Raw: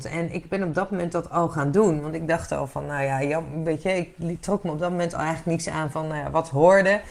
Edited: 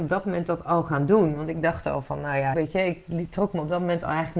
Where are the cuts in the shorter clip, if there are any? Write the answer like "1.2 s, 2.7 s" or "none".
2.5 s